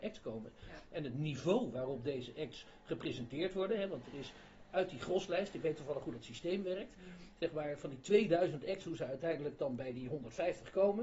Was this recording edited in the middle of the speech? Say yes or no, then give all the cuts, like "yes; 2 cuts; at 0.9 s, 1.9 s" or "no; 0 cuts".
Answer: no; 0 cuts